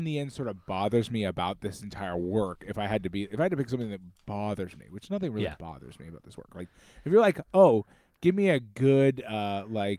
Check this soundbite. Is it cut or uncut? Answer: uncut